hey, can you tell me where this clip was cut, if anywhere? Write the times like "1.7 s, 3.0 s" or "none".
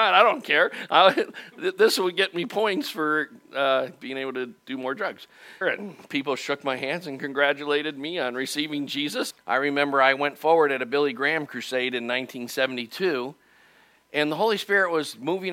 5.6 s, 9.3 s